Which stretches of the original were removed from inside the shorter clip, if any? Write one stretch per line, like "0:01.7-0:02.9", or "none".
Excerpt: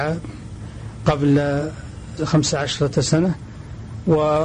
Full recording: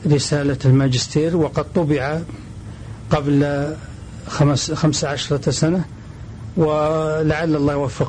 0:04.2-0:04.7